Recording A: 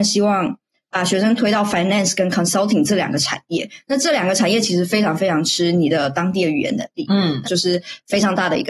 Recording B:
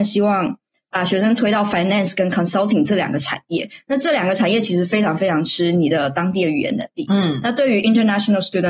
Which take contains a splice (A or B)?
A